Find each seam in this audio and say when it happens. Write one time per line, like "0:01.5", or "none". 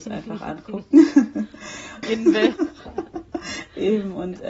0:02.0